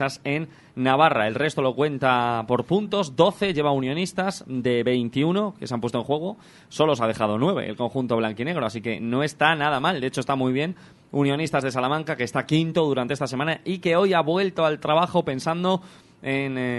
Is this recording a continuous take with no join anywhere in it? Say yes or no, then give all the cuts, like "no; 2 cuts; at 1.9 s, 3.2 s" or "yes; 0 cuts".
yes; 0 cuts